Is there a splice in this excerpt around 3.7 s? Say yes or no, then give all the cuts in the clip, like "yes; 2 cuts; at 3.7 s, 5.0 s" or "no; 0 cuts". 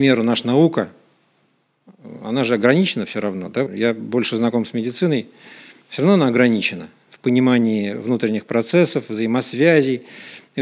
yes; 1 cut; at 3.7 s